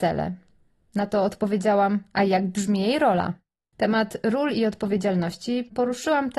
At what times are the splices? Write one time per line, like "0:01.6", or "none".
0:03.7